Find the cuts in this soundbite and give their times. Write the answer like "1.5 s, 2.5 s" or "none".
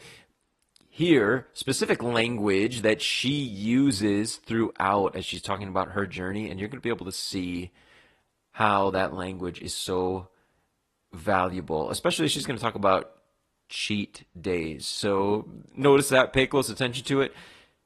none